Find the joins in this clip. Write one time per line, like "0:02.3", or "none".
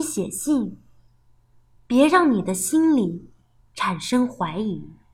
0:01.8